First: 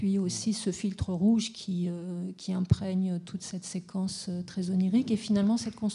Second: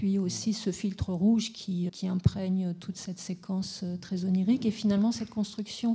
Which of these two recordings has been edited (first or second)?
second